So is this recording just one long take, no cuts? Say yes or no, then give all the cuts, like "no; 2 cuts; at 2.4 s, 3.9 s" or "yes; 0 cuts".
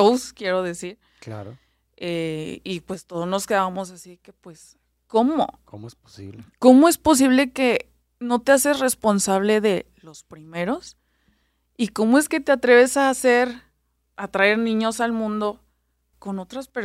yes; 0 cuts